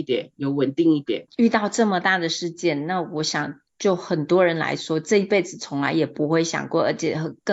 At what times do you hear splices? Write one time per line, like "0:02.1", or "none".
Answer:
0:01.3

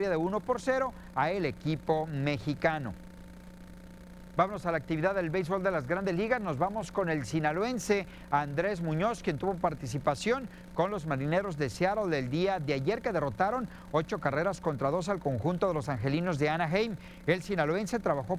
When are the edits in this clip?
none

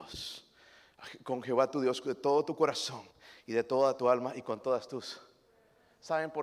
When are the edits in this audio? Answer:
none

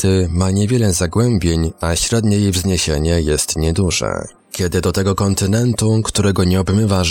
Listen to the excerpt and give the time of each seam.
0:04.4

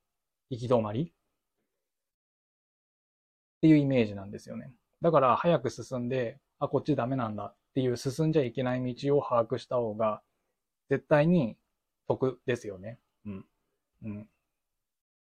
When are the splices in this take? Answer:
0:13.9

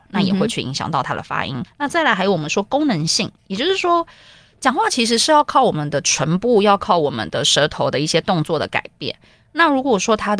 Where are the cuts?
0:01.7

